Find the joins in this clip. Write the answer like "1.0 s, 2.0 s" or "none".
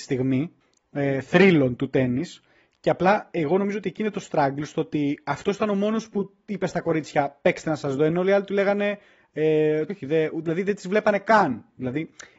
9.9 s